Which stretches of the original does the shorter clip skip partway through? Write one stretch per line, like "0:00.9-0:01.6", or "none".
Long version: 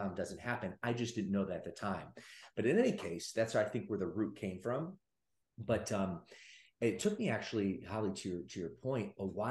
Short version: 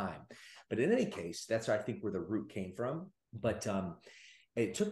0:05.1-0:05.4